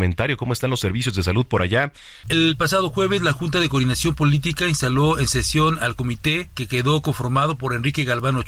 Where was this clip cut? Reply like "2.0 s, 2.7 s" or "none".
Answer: 2.2 s